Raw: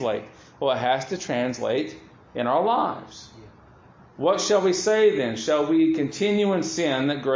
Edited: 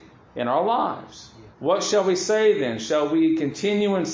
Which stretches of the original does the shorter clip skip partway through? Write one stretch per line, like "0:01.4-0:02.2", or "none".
0:03.5-0:04.1